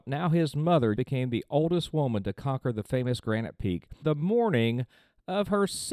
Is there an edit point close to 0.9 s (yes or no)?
yes